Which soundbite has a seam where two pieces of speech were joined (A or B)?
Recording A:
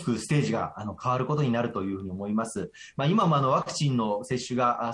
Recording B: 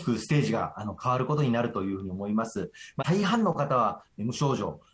B